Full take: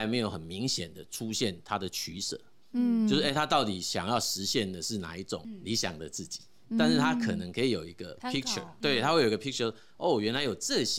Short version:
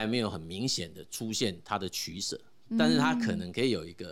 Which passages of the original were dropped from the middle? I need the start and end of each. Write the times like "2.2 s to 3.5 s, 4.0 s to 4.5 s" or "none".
2.6 s to 6.6 s